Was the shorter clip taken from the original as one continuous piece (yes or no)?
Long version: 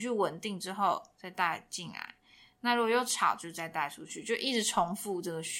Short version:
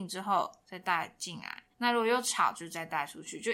no